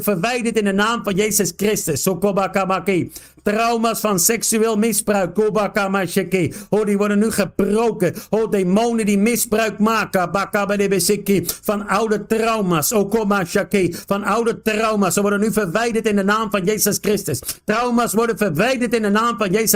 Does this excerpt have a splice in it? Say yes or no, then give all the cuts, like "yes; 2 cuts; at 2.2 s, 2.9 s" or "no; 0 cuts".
no; 0 cuts